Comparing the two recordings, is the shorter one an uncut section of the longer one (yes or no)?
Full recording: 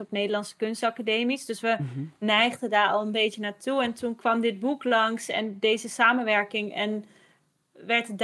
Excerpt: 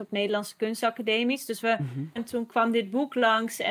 no